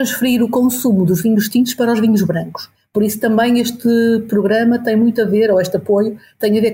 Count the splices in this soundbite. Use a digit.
0